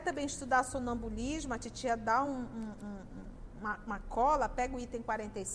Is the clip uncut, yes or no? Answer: yes